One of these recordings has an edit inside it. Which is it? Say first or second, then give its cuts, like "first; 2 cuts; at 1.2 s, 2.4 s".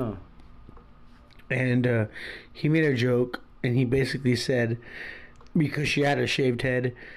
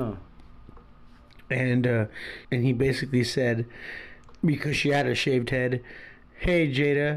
second; 1 cut; at 2.4 s